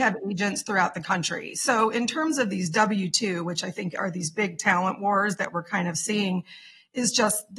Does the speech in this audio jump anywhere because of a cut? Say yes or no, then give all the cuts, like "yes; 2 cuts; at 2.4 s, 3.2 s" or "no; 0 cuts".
no; 0 cuts